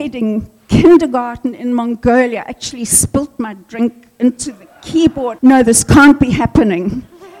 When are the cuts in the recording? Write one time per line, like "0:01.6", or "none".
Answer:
0:05.4